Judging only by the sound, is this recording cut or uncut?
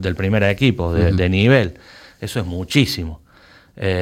uncut